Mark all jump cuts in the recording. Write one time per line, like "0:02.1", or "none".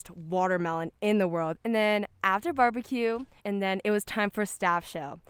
0:01.6
0:03.4

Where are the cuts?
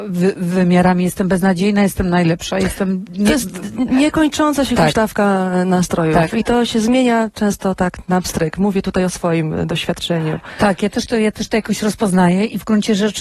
none

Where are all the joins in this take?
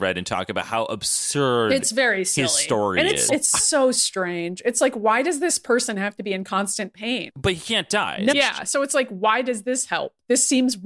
0:03.3
0:07.3
0:08.3

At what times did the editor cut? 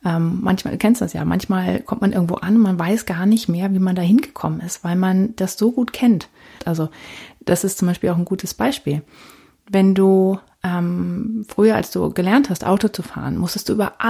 0:06.6

